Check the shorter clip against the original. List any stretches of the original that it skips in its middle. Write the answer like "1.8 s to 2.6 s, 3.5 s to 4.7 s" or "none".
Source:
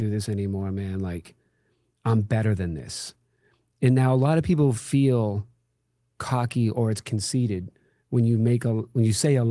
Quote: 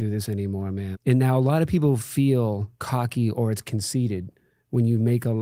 0.9 s to 3.7 s, 5.5 s to 6.1 s